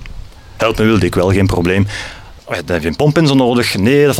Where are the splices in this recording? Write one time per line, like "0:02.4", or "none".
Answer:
0:02.4